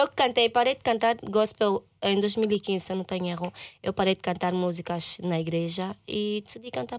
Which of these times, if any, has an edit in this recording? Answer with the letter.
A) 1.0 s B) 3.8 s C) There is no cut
C